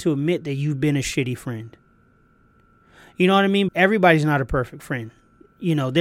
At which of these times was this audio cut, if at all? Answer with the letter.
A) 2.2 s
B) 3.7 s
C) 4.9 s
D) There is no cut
B